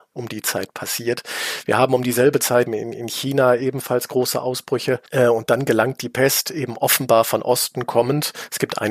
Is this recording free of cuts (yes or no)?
no